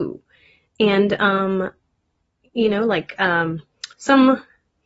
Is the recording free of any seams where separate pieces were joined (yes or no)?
yes